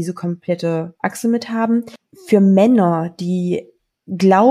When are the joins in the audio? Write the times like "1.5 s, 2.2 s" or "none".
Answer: none